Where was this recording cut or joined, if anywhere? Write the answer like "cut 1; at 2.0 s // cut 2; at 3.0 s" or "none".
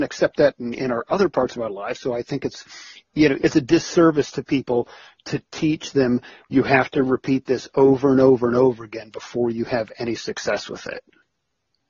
cut 1; at 3.4 s